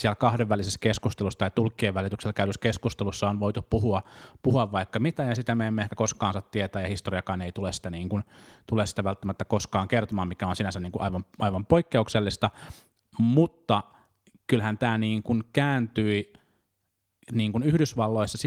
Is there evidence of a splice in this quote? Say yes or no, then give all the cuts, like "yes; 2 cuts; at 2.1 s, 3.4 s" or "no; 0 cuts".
no; 0 cuts